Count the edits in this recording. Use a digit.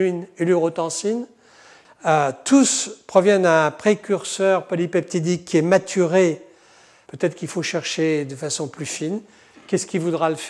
2